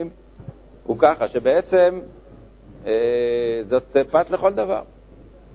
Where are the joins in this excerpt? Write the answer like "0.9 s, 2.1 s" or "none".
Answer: none